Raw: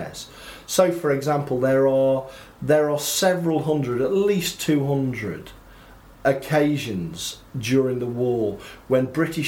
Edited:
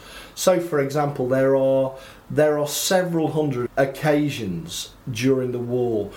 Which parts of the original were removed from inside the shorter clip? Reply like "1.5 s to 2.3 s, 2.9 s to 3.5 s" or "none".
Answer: 4.0 s to 6.1 s